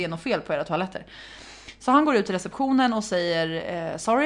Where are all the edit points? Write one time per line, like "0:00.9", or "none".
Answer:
none